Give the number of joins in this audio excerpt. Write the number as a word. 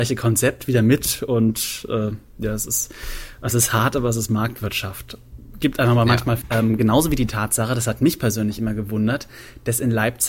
one